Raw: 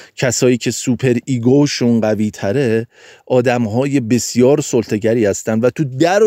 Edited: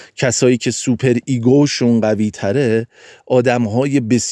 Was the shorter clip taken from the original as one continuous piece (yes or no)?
yes